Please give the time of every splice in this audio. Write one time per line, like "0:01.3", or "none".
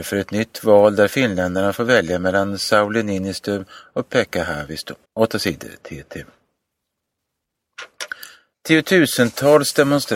0:05.0
0:08.5